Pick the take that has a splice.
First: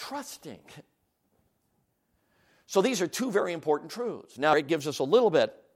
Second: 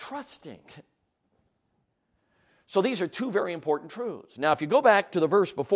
first; 1 cut; at 4.5 s

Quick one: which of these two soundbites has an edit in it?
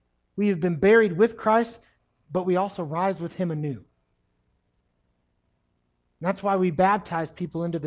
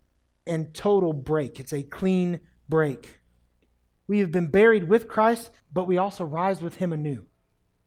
second; 2 cuts; at 4.0 s, 5.6 s

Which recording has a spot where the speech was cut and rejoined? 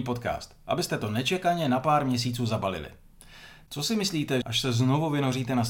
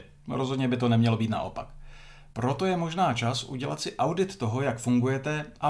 first; 1 cut; at 4.4 s

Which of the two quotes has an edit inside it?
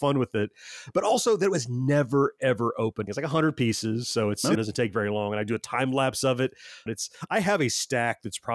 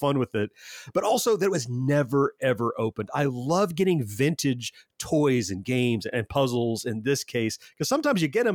first; 3 cuts; at 3.1 s, 4.6 s, 6.9 s

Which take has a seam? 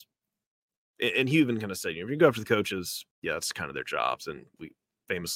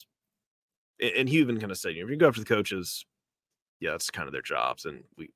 first; 1 cut; at 3.1 s

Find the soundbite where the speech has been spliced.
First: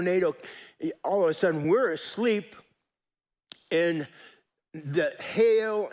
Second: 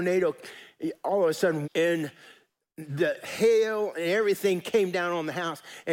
second; 1 cut; at 1.6 s

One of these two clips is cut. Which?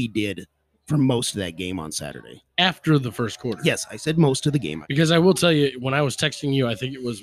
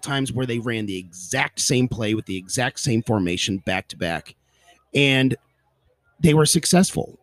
first; 1 cut; at 4.8 s

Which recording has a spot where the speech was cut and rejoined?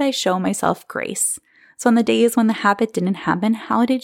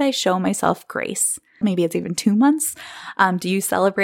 second; 1 cut; at 1.6 s

